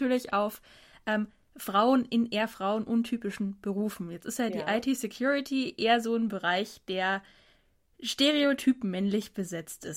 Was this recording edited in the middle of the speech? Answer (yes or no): no